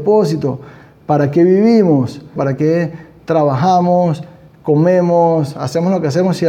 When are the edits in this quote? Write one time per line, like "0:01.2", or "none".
0:02.4